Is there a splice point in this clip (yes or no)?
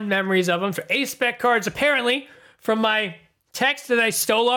no